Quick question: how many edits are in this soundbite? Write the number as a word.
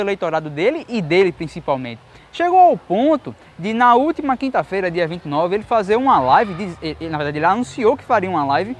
zero